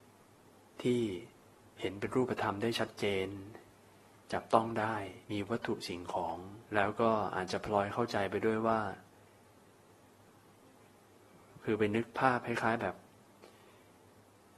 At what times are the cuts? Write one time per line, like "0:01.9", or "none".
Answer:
0:05.2
0:06.7